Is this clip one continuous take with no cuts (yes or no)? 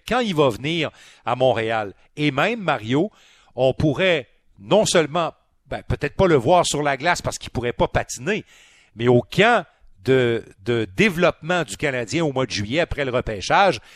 yes